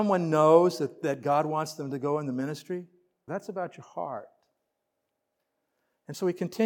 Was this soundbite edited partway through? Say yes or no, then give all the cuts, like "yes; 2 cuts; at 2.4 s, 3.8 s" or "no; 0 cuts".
yes; 1 cut; at 3.3 s